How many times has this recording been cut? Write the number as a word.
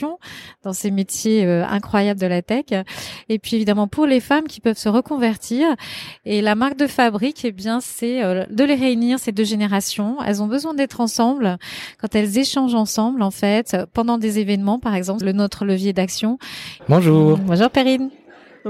two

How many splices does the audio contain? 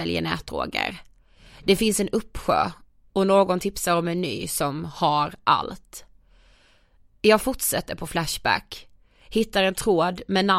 zero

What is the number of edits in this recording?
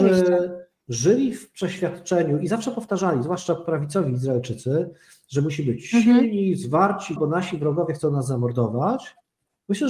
one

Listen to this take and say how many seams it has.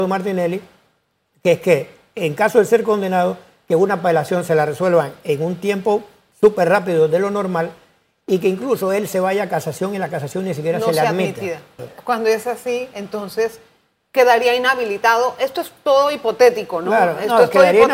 one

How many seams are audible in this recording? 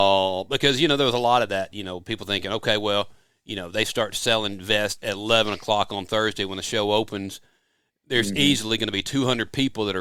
one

